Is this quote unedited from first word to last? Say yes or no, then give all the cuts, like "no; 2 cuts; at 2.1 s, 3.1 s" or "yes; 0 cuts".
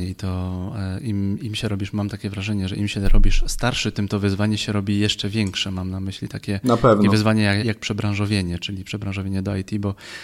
no; 1 cut; at 7.6 s